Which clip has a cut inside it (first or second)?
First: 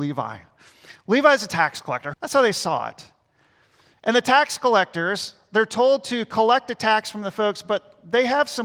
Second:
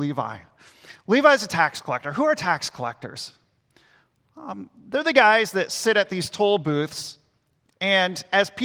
first